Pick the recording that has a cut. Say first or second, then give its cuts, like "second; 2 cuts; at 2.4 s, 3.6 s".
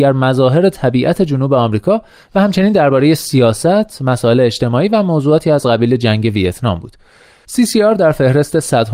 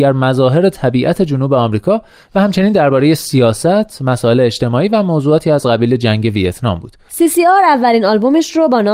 second; 1 cut; at 7.1 s